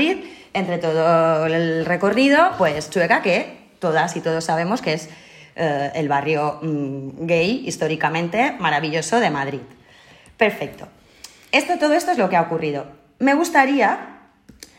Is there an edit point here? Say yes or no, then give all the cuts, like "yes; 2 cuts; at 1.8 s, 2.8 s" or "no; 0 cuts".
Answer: no; 0 cuts